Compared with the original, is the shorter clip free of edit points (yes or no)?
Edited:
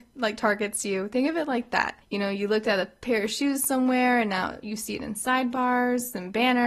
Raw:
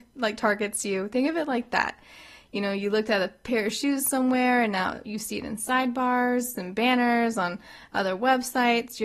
no